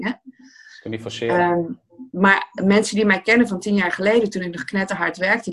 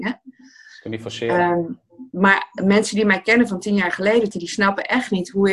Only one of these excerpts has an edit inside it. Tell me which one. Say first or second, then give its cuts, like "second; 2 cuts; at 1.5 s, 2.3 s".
second; 1 cut; at 4.3 s